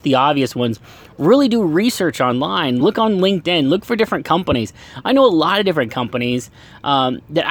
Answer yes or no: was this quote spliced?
no